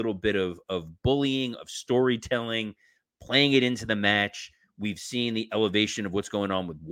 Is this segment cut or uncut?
uncut